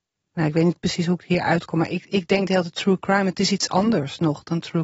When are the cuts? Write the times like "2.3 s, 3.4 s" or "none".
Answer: none